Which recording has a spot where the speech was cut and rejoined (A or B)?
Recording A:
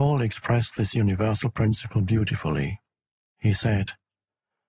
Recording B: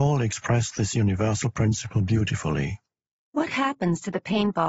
B